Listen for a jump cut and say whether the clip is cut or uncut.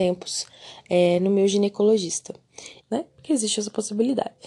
cut